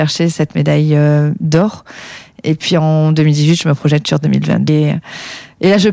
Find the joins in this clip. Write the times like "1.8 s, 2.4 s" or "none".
4.7 s